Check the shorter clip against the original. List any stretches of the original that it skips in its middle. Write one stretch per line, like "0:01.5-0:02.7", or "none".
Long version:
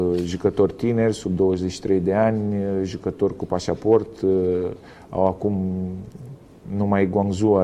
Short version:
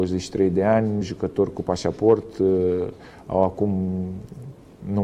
0:02.5-0:02.8